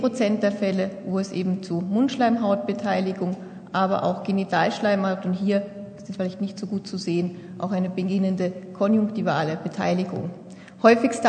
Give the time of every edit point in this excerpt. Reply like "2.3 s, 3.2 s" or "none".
none